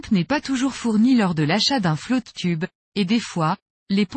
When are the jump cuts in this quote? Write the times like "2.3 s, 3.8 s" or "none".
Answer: none

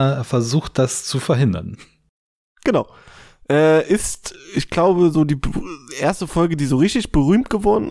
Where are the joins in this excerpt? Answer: none

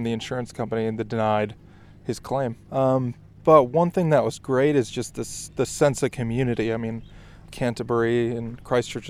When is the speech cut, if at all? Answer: 2.7 s, 7.5 s

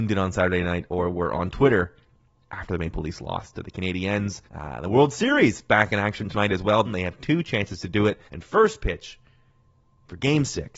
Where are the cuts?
4.5 s, 6.9 s, 8.3 s

